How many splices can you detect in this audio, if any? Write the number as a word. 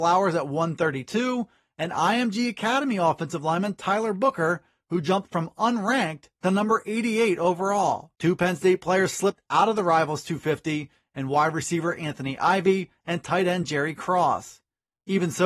one